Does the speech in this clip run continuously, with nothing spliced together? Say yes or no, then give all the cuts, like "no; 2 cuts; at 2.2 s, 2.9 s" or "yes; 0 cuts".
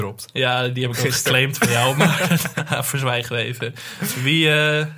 no; 1 cut; at 2.6 s